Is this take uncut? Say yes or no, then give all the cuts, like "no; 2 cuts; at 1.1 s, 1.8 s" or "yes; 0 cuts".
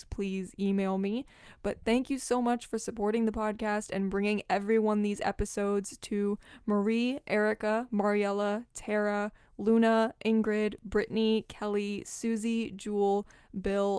yes; 0 cuts